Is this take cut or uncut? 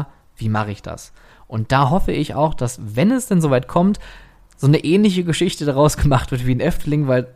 uncut